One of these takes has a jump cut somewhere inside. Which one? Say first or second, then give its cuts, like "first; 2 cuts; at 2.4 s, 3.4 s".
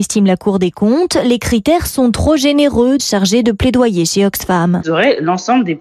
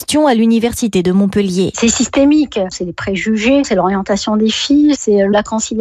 first; 2 cuts; at 3.0 s, 4.8 s